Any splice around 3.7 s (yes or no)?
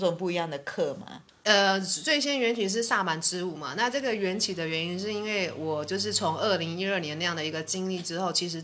no